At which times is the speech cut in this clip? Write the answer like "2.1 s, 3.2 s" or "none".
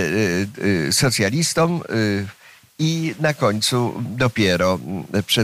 none